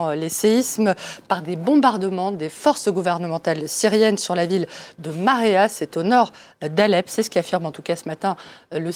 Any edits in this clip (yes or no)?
no